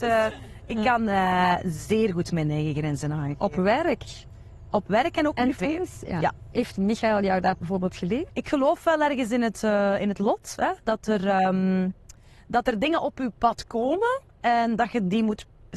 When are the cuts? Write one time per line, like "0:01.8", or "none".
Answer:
0:08.3